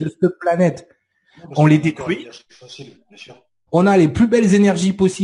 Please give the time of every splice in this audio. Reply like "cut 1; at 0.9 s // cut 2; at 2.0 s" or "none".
cut 1; at 3.7 s